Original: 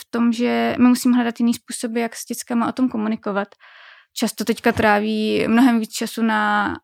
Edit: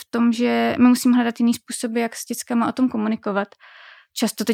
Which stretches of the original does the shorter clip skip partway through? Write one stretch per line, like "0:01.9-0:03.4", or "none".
none